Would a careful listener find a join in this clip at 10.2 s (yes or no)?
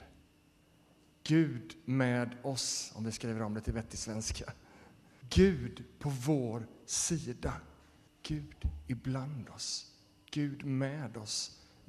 no